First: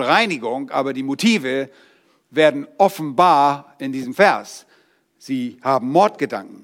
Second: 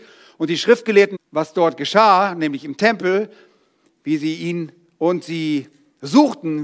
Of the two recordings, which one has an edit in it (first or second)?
second